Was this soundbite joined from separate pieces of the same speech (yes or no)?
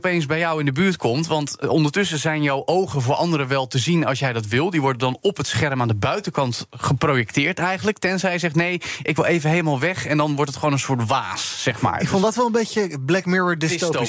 no